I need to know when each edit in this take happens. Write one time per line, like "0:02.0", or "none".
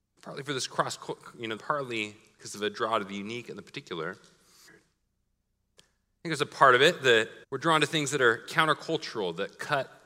0:01.6
0:04.7
0:07.4